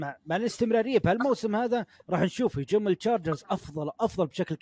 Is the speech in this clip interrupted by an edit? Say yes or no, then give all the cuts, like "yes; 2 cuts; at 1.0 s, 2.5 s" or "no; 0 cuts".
no; 0 cuts